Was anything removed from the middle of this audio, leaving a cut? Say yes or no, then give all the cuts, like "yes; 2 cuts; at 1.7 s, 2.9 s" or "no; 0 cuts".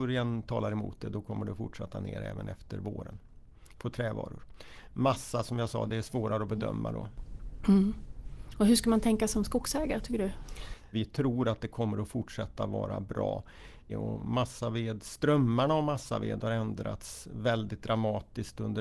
yes; 2 cuts; at 10.9 s, 13.9 s